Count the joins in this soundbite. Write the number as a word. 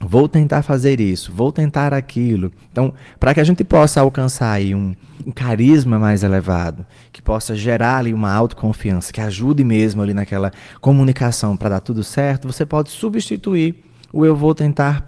two